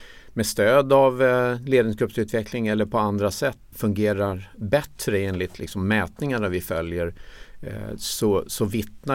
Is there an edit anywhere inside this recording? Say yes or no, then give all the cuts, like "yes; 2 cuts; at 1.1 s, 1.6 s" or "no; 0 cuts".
yes; 1 cut; at 3.7 s